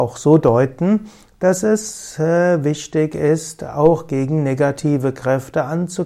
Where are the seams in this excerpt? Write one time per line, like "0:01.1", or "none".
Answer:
none